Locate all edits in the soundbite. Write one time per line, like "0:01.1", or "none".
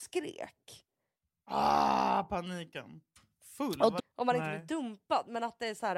0:04.0